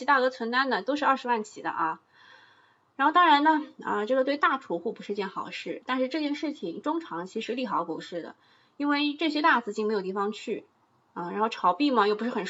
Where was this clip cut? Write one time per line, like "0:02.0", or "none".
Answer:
none